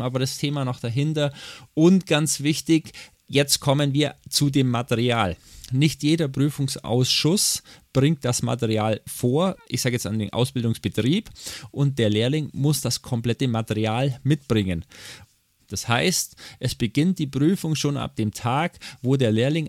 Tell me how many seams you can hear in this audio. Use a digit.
2